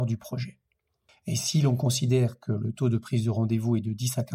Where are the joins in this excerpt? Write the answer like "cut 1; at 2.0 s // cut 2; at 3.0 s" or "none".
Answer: cut 1; at 1.1 s